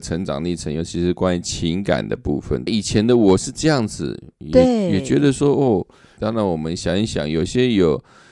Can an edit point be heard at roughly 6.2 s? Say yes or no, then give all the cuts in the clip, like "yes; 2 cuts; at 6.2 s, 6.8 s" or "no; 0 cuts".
yes; 2 cuts; at 2.7 s, 6.2 s